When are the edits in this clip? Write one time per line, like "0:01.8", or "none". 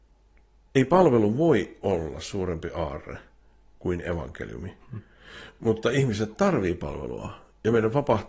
none